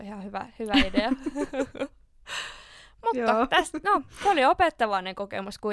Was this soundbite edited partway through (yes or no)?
no